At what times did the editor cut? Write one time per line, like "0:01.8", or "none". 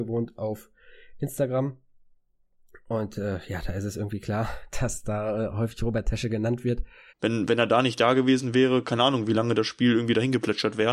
0:07.1